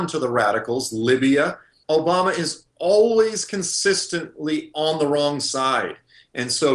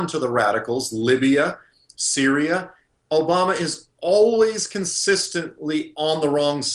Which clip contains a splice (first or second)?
first